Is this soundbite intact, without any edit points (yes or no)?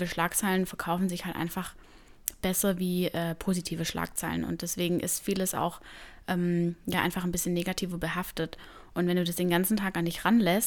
yes